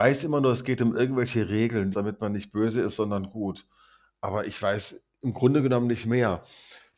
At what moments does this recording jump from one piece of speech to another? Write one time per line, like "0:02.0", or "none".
0:01.9